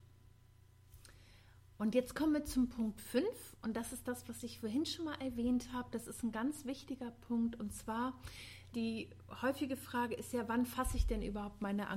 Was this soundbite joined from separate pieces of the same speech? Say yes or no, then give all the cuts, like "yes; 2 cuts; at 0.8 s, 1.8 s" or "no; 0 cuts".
yes; 1 cut; at 8.7 s